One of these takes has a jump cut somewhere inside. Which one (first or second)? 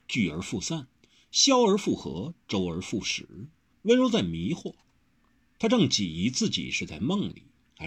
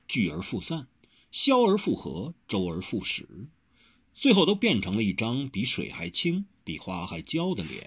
first